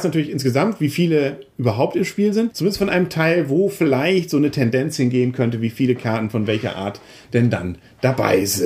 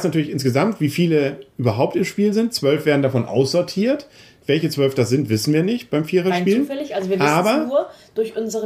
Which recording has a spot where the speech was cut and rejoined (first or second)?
first